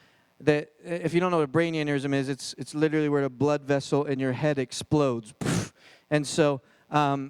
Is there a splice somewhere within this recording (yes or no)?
no